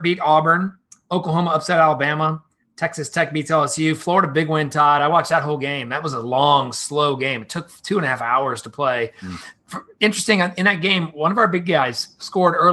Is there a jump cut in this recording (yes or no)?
no